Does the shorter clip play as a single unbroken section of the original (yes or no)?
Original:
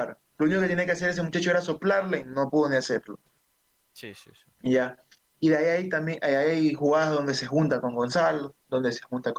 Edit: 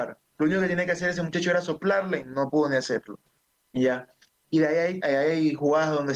no